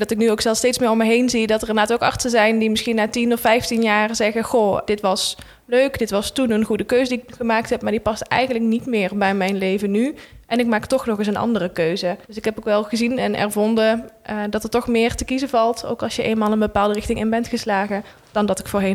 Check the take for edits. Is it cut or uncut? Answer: cut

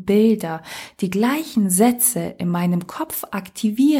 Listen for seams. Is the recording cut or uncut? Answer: uncut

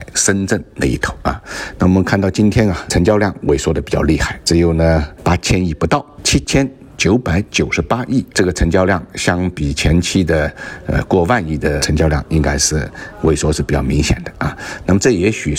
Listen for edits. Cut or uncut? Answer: uncut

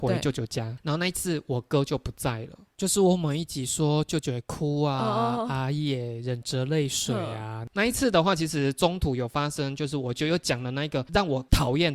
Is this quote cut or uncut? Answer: cut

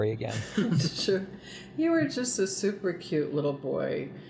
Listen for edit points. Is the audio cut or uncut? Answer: uncut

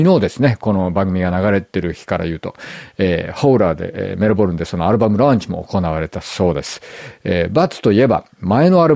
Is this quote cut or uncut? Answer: uncut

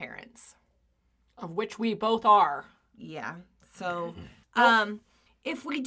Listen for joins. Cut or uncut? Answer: cut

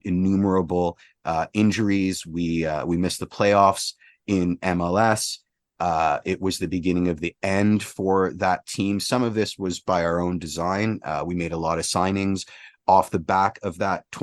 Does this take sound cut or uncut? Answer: uncut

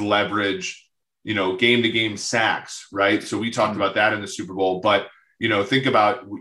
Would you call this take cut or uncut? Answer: uncut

